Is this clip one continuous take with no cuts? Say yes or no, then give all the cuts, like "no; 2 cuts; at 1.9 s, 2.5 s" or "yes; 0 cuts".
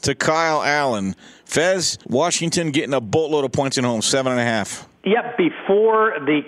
no; 1 cut; at 2.0 s